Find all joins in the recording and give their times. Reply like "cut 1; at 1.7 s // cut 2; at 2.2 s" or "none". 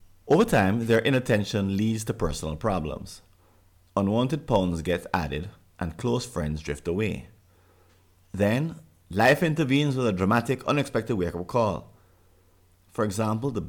cut 1; at 5.7 s

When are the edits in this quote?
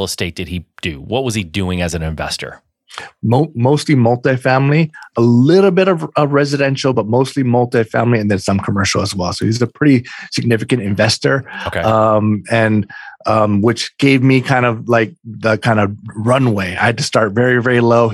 none

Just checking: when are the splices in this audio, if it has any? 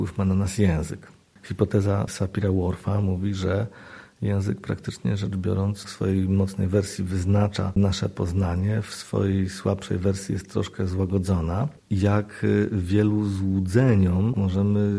cut 1; at 11.8 s

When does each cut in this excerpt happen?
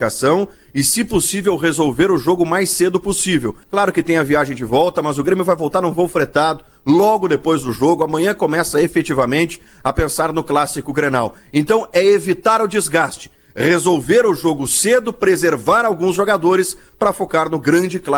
cut 1; at 3.6 s

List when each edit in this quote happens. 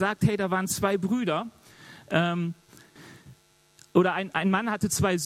none

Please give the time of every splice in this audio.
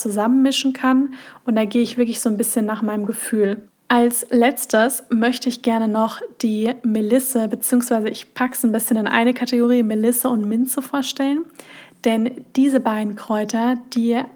cut 1; at 3.7 s

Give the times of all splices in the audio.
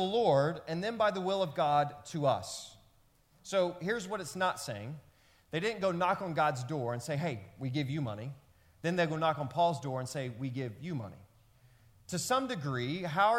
none

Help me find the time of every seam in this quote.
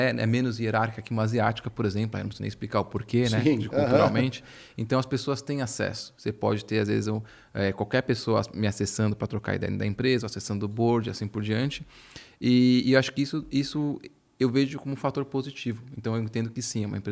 none

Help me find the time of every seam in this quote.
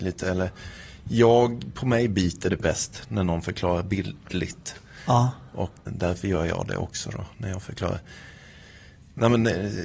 cut 1; at 5.9 s

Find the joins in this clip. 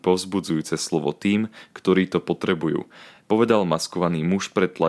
none

